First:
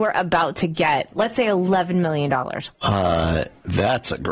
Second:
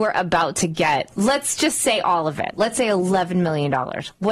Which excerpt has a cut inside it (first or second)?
first